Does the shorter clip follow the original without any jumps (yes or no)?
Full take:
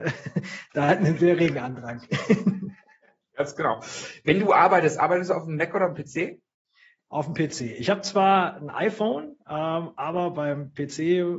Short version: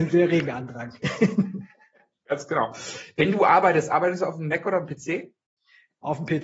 yes